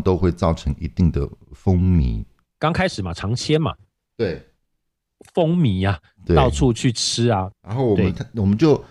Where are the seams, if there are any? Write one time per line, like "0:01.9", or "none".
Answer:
0:05.2
0:07.5